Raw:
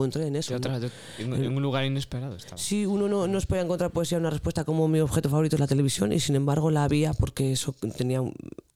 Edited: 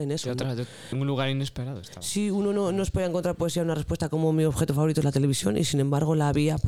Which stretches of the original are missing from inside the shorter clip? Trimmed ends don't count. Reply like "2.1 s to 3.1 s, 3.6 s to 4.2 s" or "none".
1.2 s to 1.5 s